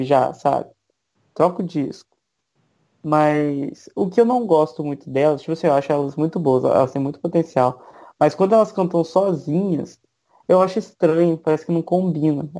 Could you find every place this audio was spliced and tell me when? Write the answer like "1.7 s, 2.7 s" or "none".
none